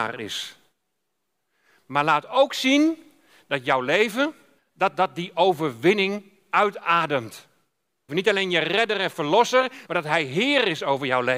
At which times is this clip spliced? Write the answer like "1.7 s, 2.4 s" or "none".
4.6 s, 8.1 s, 9.9 s